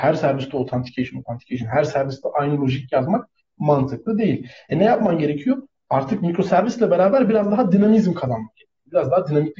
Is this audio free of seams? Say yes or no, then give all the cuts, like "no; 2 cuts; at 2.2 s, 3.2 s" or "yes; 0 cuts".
yes; 0 cuts